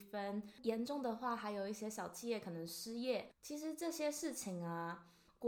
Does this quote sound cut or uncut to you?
uncut